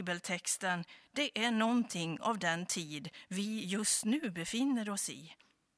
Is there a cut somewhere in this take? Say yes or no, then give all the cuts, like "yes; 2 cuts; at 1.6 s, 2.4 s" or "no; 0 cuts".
no; 0 cuts